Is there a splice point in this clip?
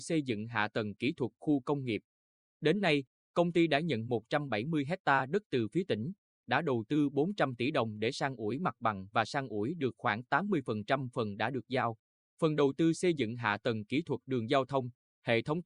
no; 0 cuts

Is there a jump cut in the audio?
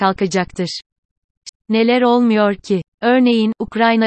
yes; 1 cut; at 1.5 s

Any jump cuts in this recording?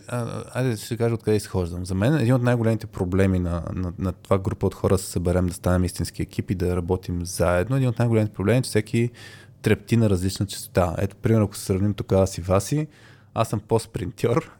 no; 0 cuts

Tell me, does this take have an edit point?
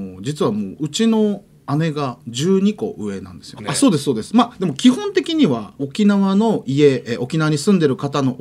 yes; 2 cuts; at 3.6 s, 5.8 s

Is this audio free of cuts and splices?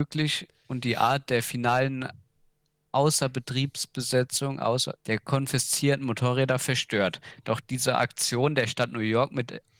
no; 1 cut; at 5.0 s

